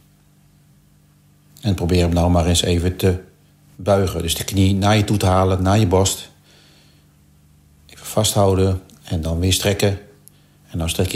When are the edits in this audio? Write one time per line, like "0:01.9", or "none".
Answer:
none